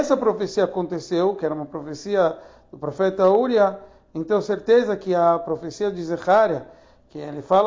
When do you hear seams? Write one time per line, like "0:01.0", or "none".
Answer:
none